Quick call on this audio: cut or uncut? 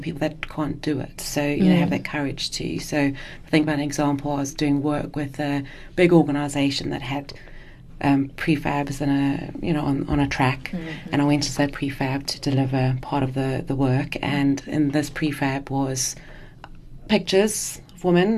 uncut